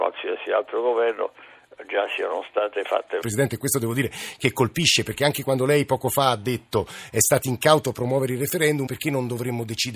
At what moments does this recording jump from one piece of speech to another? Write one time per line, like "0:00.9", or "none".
0:03.2
0:08.9